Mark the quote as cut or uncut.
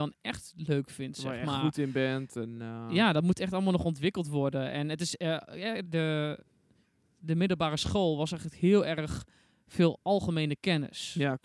cut